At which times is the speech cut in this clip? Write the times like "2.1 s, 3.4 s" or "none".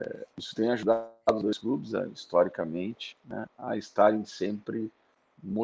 none